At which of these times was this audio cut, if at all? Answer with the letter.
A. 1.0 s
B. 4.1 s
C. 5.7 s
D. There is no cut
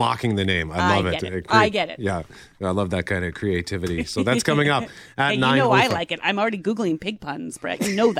D